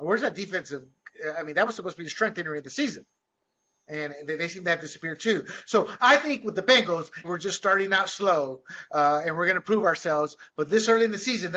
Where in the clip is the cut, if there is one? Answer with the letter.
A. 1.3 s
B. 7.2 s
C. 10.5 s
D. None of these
B